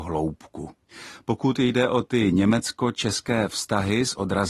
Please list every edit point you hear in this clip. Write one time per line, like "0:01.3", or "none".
none

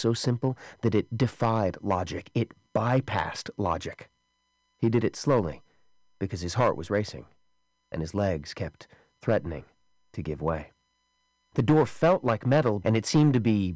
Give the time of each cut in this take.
0:04.7
0:11.5
0:12.8

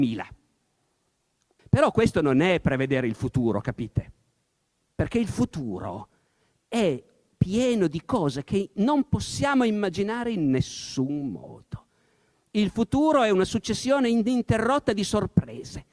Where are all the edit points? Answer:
0:01.6

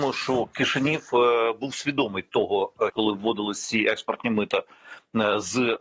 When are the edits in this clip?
0:02.9

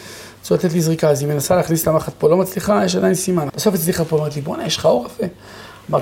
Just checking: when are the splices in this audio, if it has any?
0:03.5

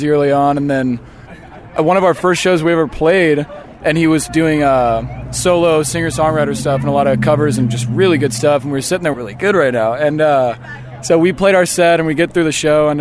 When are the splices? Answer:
0:03.8
0:09.1

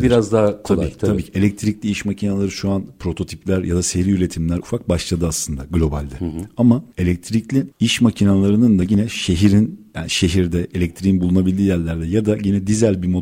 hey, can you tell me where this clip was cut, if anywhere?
0:04.6

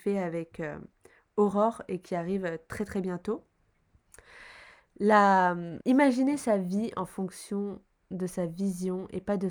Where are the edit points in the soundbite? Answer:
0:05.8

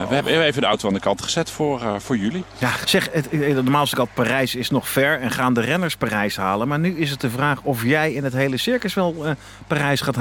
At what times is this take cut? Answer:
0:02.8

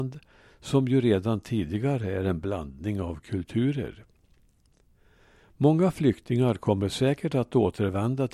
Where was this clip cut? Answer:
none

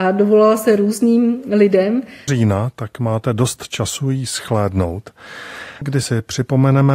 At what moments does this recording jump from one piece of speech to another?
0:02.3
0:05.8

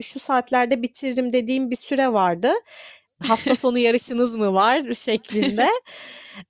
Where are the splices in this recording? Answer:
0:03.1

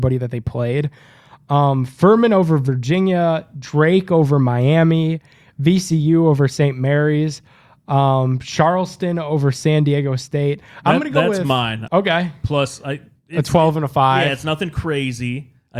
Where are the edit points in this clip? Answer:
0:11.9

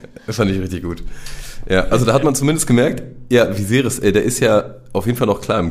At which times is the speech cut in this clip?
none

